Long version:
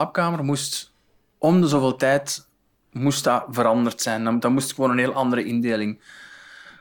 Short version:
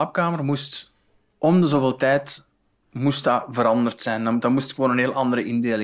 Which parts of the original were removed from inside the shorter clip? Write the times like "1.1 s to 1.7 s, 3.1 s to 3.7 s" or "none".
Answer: none